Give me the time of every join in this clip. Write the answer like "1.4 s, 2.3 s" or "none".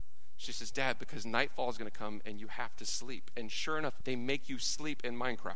4.0 s